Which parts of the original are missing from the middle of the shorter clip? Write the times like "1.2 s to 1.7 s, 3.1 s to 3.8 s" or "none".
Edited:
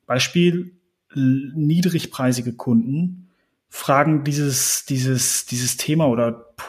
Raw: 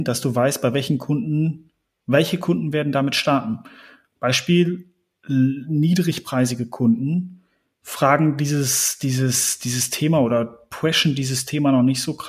none